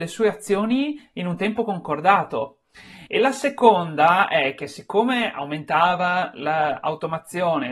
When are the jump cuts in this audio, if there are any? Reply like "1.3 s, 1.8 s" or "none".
none